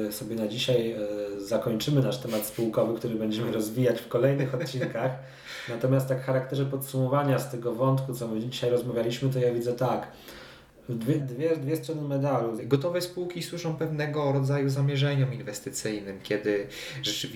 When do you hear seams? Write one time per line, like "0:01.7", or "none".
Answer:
0:11.2
0:12.6